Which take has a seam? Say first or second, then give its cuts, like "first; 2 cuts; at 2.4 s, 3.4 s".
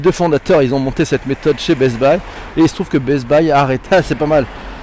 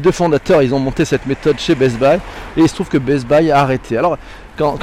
first; 1 cut; at 3.9 s